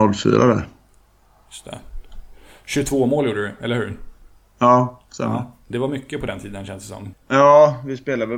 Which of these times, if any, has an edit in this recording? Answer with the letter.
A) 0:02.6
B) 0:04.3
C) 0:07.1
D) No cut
C